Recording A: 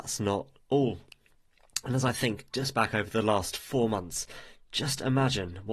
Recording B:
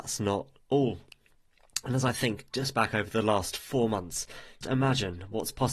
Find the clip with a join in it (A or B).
B